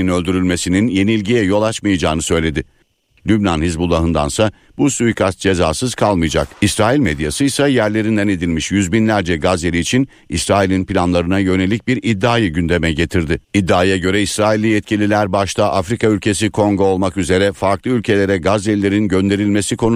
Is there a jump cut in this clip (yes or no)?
yes